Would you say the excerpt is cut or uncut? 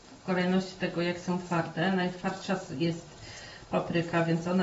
uncut